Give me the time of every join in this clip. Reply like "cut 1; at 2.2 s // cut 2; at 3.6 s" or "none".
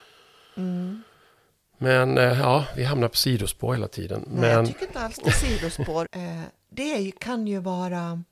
cut 1; at 6.0 s